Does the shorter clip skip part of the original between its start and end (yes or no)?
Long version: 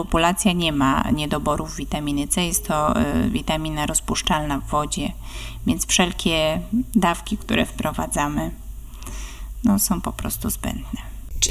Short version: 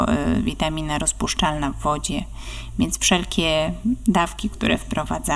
no